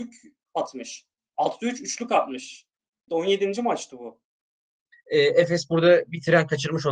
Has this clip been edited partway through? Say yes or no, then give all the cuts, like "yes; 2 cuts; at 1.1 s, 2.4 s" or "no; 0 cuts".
yes; 2 cuts; at 3.1 s, 4.9 s